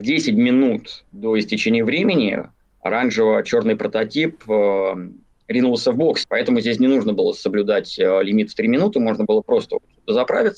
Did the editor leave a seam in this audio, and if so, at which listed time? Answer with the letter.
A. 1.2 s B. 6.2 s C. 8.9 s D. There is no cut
B